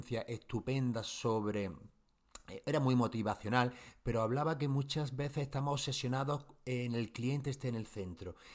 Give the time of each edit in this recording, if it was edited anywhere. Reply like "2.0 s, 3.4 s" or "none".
none